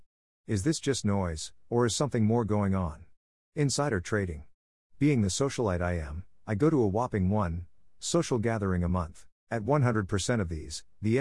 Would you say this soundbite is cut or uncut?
cut